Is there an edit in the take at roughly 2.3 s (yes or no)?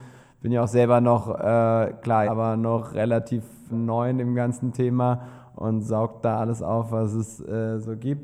yes